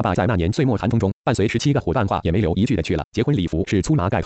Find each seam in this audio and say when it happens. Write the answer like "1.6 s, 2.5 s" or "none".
3.0 s